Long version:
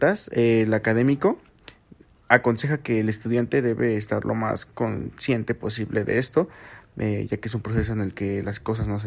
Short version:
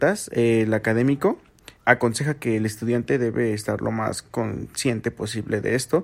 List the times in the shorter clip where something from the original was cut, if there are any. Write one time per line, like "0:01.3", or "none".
0:01.8